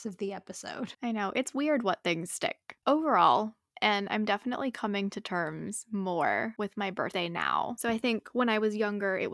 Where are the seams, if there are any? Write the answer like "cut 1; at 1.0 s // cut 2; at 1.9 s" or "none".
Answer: cut 1; at 3.7 s